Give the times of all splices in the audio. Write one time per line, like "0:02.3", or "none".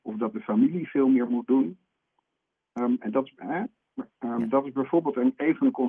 none